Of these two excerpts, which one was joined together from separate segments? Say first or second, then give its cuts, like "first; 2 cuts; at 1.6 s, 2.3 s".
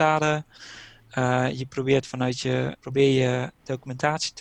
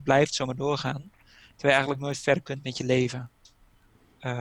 first; 1 cut; at 2.8 s